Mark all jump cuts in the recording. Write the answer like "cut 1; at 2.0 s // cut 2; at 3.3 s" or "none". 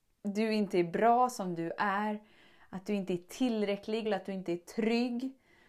cut 1; at 4.1 s